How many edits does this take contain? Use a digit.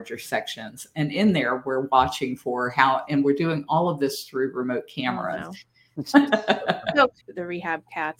2